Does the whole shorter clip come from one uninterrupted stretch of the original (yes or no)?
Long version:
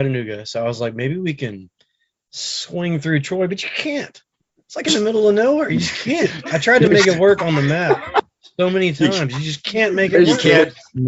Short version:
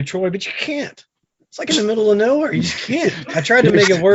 yes